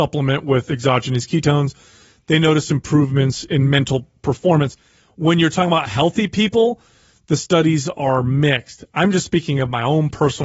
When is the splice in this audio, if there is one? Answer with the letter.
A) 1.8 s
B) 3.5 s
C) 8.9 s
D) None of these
B